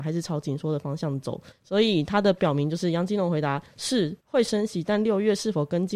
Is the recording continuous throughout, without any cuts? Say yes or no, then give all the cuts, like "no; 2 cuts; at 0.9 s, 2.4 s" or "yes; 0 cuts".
no; 2 cuts; at 1.5 s, 4.2 s